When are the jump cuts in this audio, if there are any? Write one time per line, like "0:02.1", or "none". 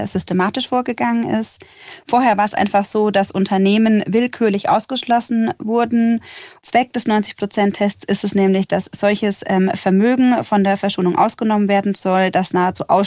0:06.6

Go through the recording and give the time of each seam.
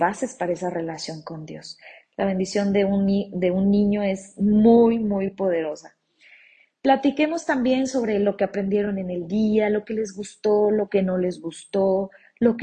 0:02.0

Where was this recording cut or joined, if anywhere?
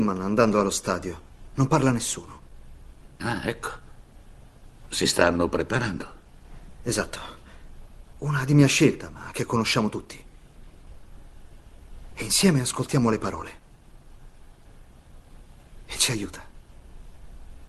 0:08.1

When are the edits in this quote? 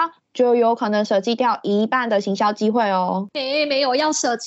none

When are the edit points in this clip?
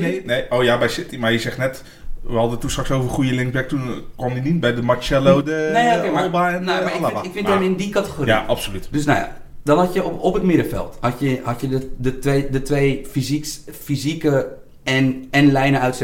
none

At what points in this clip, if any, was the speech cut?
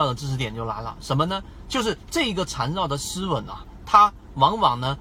none

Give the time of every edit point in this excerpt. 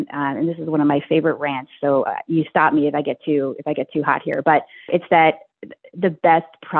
0:04.9

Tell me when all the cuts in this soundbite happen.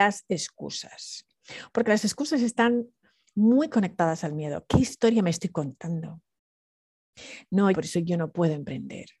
0:07.7

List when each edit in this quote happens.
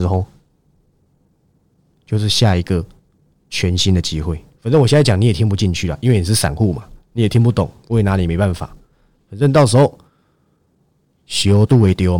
none

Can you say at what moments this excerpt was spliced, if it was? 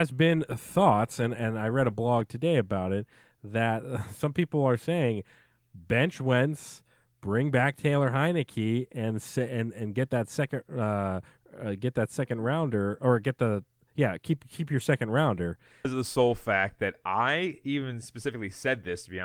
0:15.8

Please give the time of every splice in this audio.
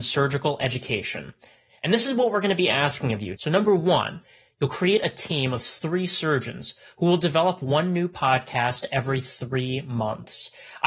0:03.4

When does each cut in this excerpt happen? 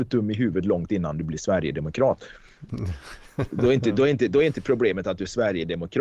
none

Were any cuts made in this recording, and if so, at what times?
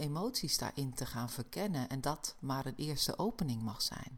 0:02.0

